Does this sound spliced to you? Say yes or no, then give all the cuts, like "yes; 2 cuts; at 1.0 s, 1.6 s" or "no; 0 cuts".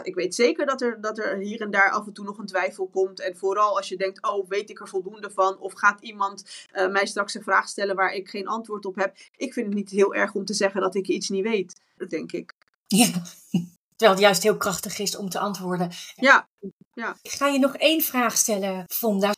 yes; 2 cuts; at 12.1 s, 16.2 s